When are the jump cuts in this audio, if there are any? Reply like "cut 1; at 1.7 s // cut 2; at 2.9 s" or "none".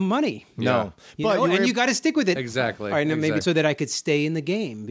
cut 1; at 2.4 s // cut 2; at 3.4 s

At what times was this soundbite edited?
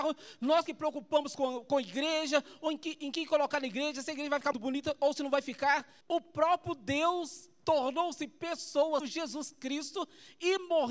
cut 1; at 4.5 s // cut 2; at 6.0 s // cut 3; at 9.0 s

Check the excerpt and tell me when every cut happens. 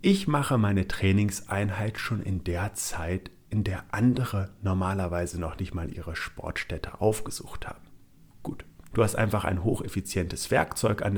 cut 1; at 8.9 s

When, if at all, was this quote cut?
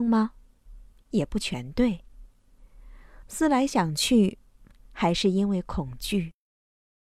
none

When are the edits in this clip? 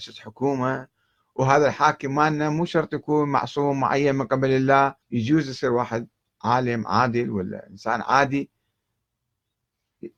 cut 1; at 5.0 s

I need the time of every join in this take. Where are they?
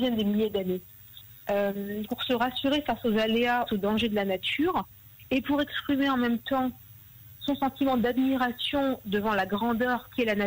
cut 1; at 2.1 s // cut 2; at 3.7 s

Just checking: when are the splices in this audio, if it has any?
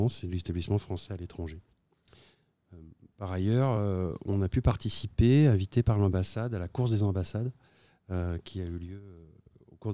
none

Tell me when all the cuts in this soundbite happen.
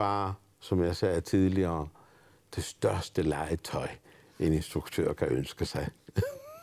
none

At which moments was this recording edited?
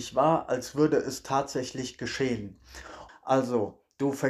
cut 1; at 3.1 s

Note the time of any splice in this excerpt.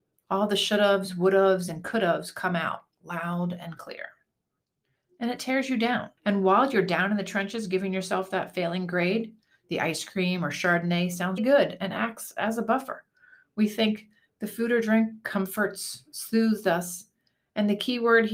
cut 1; at 6.2 s // cut 2; at 11.4 s

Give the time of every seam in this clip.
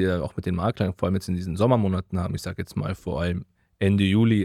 none

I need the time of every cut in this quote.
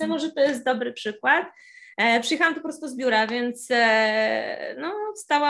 none

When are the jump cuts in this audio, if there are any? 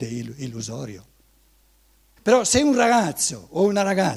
cut 1; at 2.2 s

